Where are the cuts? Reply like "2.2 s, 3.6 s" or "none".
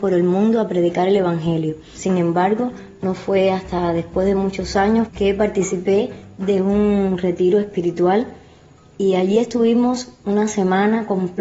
1.9 s, 5.1 s